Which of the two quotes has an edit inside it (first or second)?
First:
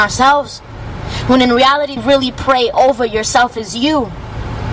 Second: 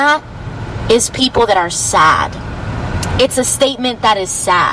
first